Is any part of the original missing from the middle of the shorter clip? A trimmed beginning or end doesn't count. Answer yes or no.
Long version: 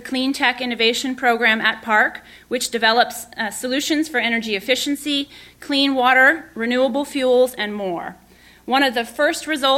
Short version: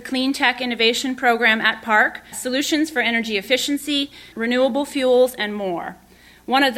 yes